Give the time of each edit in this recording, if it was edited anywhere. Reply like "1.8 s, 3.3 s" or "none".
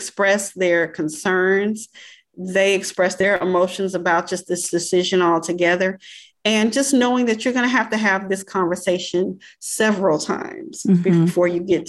none